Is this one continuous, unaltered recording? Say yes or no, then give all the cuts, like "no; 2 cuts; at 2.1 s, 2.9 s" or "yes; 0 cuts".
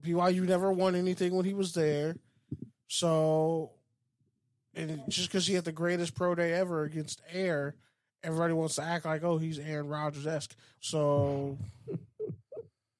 no; 1 cut; at 10.8 s